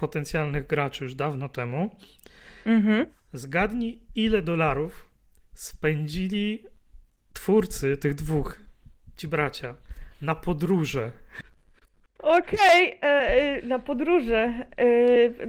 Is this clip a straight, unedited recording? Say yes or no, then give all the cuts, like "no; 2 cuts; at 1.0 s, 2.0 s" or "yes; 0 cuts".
yes; 0 cuts